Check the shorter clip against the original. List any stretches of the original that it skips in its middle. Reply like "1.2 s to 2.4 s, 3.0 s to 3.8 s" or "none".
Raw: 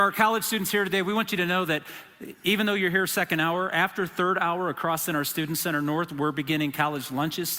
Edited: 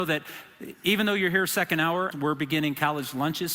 3.7 s to 6.1 s